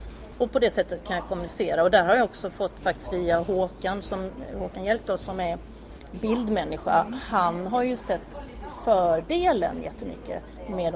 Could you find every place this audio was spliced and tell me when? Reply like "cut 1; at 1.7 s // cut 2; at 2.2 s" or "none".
none